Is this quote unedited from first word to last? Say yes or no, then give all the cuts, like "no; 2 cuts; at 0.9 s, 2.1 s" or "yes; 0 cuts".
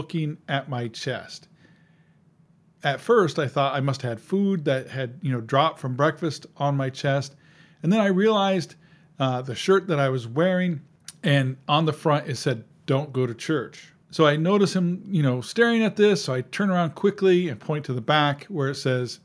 yes; 0 cuts